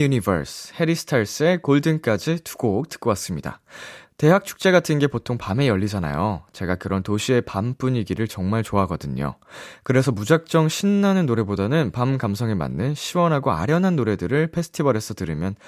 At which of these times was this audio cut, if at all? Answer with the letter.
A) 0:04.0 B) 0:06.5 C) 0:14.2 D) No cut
A